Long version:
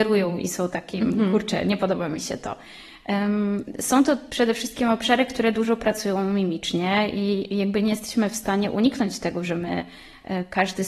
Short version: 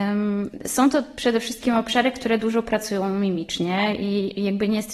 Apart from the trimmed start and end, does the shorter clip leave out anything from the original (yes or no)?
no